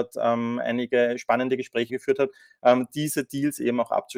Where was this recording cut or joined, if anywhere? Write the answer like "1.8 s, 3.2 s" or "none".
1.9 s